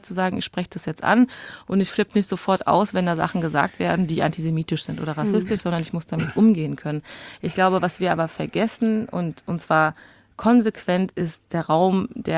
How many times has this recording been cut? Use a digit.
0